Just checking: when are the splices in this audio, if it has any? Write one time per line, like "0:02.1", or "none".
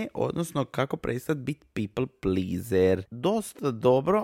0:03.1